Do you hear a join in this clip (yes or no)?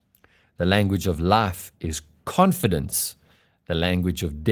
no